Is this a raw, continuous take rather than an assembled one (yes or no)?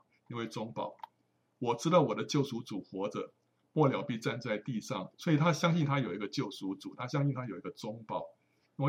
no